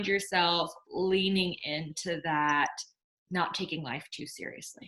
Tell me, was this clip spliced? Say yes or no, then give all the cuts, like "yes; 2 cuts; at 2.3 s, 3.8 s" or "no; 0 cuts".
no; 0 cuts